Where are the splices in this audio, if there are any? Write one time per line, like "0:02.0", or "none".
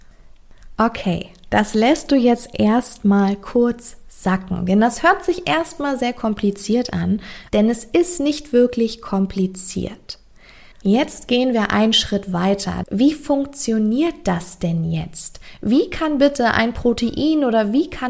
0:07.5
0:10.7
0:12.8